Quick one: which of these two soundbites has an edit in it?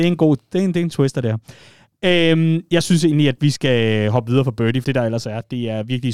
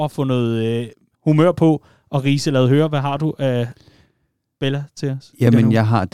first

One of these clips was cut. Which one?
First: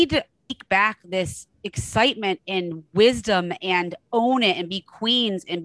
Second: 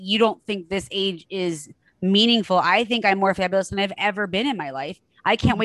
first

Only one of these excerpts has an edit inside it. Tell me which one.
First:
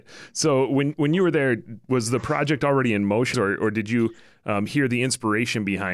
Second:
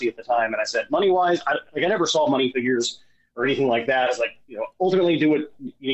first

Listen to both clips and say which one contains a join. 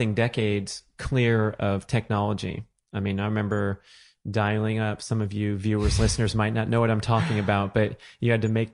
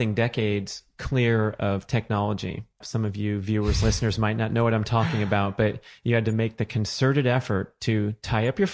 second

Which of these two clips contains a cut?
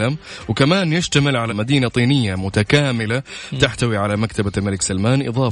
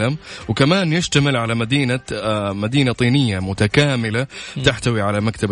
first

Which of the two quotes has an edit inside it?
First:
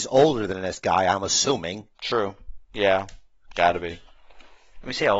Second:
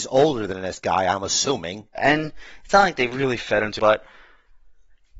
second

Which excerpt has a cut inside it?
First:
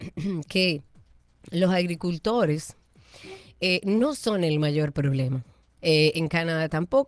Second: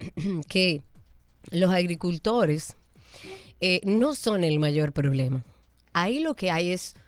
first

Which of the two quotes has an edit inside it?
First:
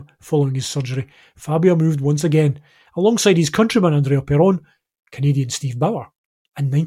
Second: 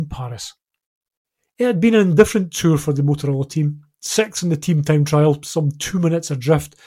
first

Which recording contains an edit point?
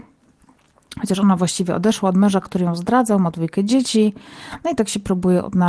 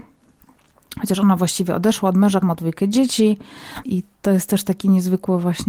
second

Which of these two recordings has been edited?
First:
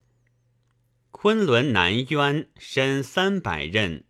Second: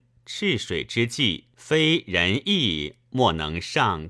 second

